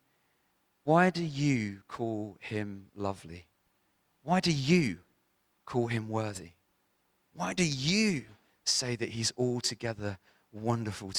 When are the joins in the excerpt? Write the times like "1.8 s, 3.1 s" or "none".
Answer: none